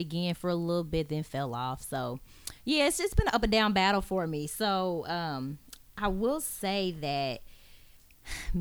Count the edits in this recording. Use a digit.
0